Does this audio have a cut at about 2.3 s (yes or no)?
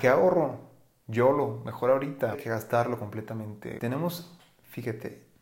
yes